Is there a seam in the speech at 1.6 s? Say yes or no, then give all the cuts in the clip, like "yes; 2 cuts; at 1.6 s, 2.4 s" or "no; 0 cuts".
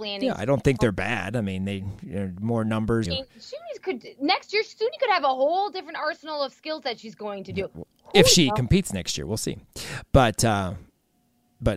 no; 1 cut; at 3.0 s